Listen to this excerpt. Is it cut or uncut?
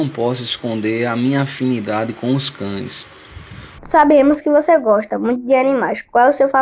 cut